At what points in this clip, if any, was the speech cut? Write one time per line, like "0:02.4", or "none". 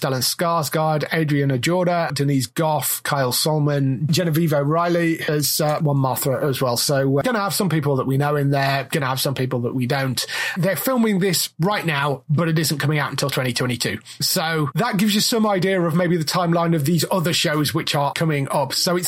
0:02.1
0:07.2